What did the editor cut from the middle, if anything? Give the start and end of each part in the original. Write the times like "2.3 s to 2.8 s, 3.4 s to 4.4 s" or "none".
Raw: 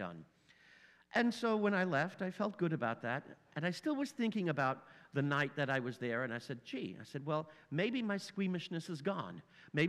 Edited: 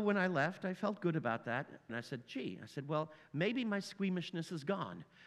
3.5 s to 6.3 s